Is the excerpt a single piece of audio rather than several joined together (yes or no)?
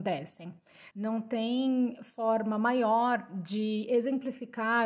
no